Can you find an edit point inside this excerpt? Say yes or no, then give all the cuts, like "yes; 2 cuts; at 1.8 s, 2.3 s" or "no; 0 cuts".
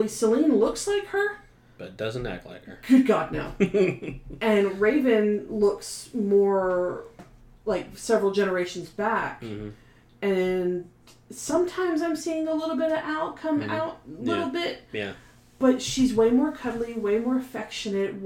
no; 0 cuts